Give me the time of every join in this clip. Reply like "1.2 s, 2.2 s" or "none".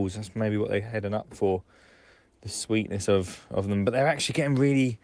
none